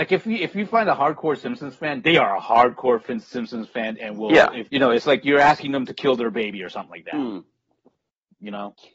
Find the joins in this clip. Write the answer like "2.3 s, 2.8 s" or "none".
4.7 s